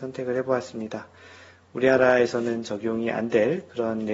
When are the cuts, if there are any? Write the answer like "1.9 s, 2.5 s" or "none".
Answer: none